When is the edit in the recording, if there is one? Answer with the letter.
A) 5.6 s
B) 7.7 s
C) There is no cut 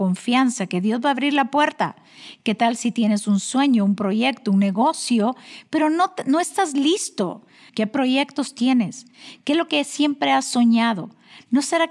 B